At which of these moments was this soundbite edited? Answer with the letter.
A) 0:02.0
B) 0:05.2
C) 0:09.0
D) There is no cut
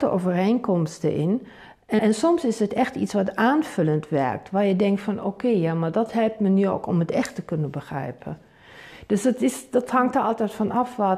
A